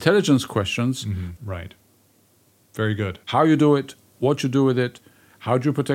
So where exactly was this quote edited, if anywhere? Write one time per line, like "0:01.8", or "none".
0:01.4
0:03.2